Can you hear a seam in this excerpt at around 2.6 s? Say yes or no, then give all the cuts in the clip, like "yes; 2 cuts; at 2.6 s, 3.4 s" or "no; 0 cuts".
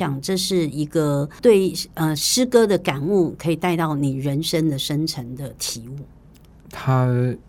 no; 1 cut; at 6.6 s